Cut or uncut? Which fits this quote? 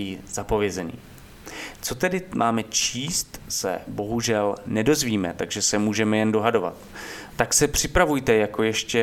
cut